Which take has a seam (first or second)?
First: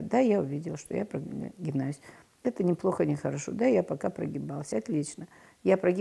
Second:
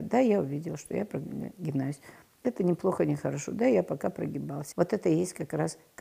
second